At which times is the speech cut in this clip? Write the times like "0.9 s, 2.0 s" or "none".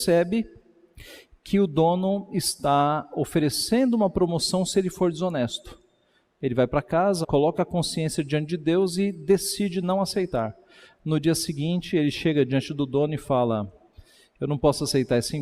7.2 s